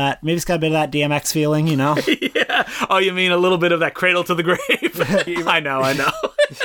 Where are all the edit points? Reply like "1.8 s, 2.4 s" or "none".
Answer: 5.3 s